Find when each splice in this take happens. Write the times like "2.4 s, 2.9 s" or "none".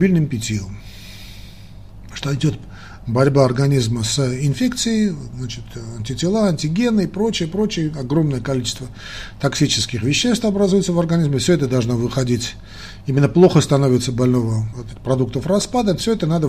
2.1 s, 14.7 s